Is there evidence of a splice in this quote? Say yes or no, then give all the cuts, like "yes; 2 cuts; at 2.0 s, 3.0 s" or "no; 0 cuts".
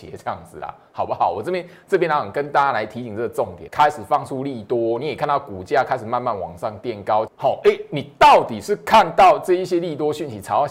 yes; 2 cuts; at 3.7 s, 7.3 s